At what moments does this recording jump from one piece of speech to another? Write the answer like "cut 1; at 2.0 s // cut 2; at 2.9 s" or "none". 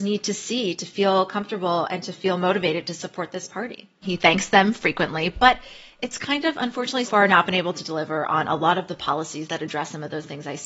cut 1; at 4.0 s // cut 2; at 7.1 s